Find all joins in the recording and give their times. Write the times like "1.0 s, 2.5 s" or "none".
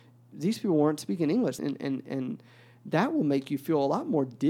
1.6 s